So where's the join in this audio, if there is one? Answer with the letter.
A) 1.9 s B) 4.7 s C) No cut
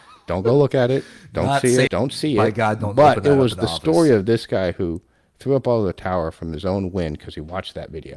A